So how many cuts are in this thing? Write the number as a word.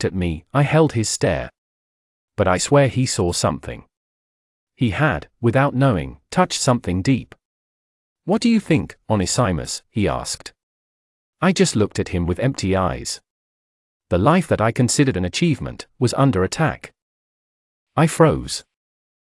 zero